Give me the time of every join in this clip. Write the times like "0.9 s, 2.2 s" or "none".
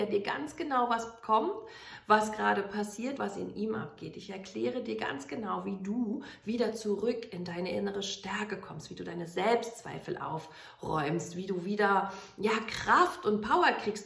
3.2 s